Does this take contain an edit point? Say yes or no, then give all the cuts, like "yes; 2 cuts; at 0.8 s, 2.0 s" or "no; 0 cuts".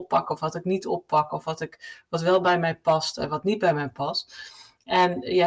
no; 0 cuts